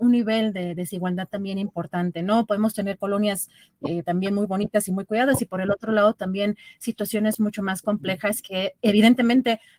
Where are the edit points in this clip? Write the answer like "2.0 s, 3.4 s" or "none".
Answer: 4.0 s, 8.8 s